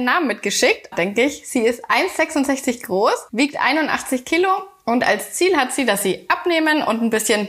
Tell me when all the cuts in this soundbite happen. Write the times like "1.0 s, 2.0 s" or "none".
0.9 s